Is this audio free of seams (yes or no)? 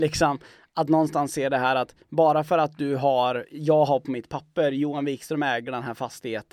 yes